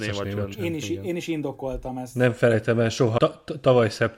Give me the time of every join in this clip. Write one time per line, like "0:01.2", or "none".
0:03.2